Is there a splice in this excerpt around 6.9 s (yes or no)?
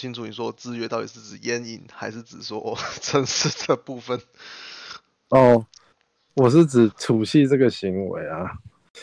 yes